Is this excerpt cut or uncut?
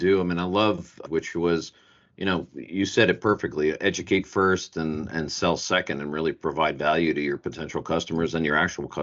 cut